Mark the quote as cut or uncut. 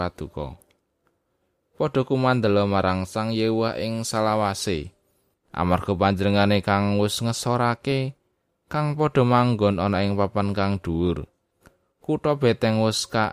cut